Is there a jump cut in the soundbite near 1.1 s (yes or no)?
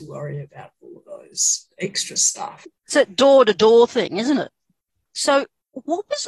no